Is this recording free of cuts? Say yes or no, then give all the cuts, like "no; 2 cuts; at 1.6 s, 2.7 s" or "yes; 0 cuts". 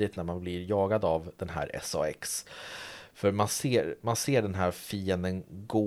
yes; 0 cuts